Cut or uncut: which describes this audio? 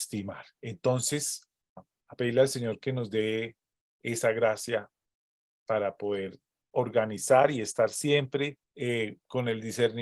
cut